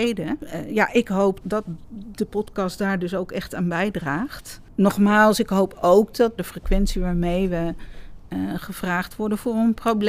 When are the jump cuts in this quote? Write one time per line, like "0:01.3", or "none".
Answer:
0:01.4
0:06.4